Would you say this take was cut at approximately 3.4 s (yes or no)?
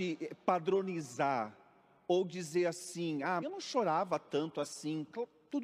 yes